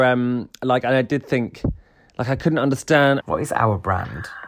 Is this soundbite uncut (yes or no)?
no